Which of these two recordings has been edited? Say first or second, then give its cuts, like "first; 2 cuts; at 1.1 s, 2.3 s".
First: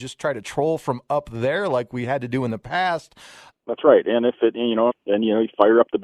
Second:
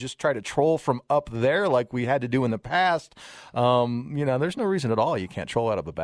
first; 2 cuts; at 3.5 s, 4.9 s